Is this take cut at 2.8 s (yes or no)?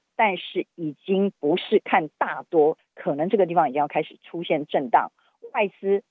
yes